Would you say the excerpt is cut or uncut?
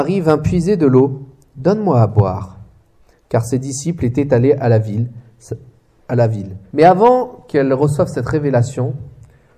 cut